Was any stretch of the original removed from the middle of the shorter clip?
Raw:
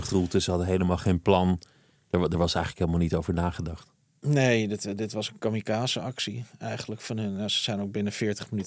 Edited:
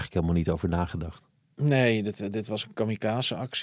no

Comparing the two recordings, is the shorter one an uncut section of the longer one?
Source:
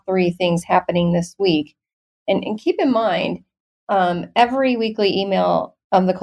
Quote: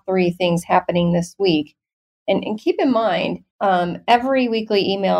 no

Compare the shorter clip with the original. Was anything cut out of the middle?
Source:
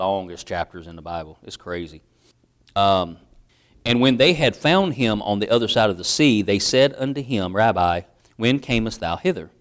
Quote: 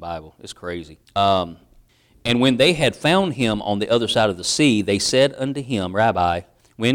yes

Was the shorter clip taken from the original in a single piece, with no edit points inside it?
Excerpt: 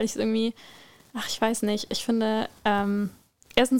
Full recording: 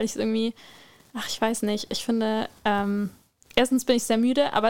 yes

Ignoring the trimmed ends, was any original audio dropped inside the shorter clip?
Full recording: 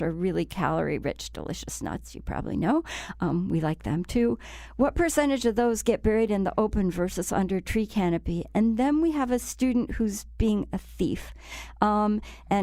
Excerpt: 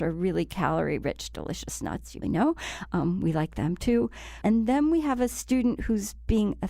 yes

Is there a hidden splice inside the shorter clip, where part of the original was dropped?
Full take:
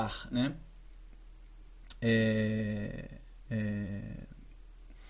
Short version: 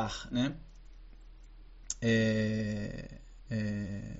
no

